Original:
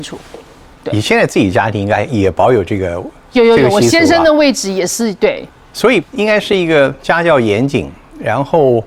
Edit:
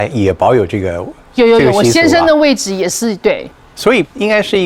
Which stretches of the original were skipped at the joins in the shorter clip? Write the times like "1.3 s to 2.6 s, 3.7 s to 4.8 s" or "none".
none